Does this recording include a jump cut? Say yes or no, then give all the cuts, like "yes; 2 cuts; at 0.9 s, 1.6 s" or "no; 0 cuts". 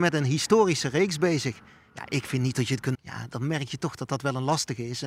yes; 1 cut; at 2.9 s